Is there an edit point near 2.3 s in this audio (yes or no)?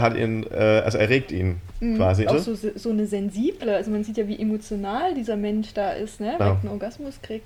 yes